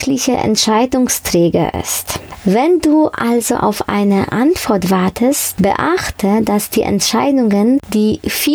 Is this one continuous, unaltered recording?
yes; 0 cuts

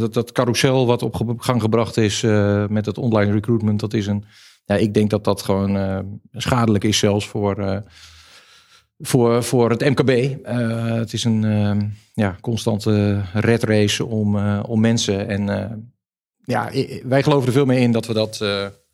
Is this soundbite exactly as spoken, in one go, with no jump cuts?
yes; 0 cuts

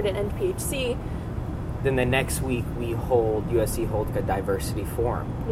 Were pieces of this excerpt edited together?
yes; 1 cut; at 1.8 s

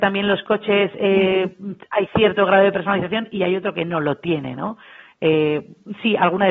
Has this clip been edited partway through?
no; 0 cuts

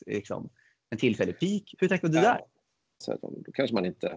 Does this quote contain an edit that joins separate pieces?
yes; 1 cut; at 3.0 s

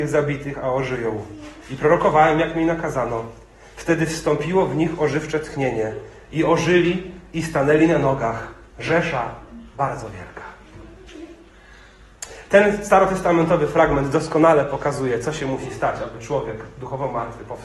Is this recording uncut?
yes; 0 cuts

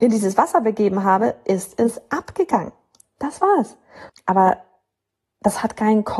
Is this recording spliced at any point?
yes; 2 cuts; at 3.0 s, 4.1 s

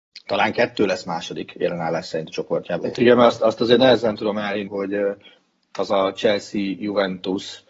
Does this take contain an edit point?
yes; 2 cuts; at 2.8 s, 4.7 s

